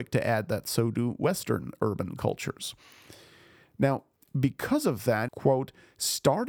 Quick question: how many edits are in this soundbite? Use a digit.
1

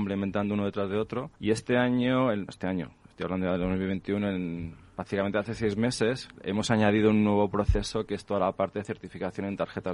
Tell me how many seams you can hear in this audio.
2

